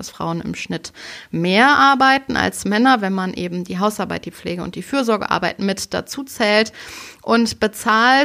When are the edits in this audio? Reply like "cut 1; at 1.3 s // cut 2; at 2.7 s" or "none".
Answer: none